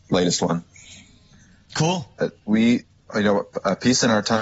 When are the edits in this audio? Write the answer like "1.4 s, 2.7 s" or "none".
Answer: 2.2 s